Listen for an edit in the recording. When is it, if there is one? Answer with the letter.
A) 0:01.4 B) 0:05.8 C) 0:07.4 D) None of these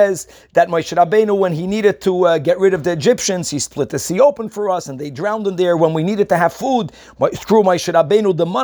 D